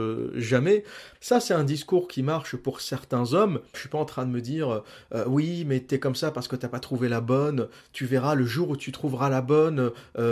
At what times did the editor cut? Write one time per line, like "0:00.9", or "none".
0:01.1
0:03.7